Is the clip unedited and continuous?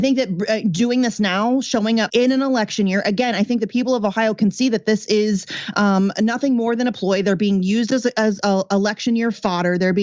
no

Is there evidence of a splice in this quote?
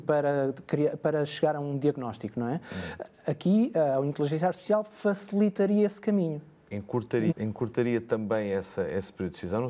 yes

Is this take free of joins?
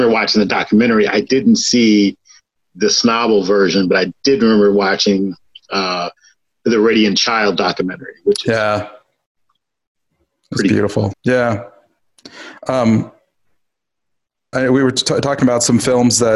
no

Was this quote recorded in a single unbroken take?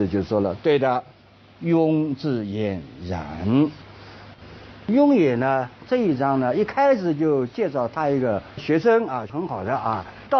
yes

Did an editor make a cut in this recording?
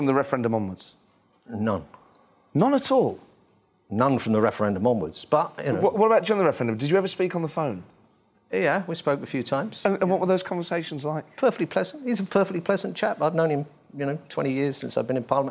no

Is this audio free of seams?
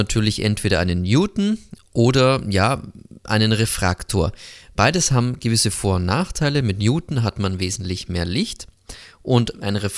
yes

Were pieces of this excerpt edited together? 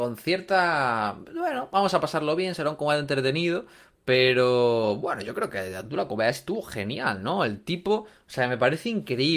no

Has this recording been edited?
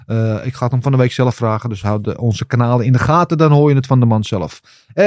no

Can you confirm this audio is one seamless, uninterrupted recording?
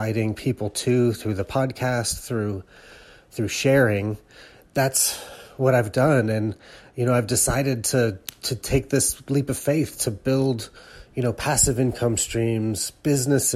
yes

